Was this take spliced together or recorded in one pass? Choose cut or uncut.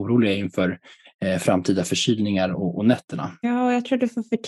cut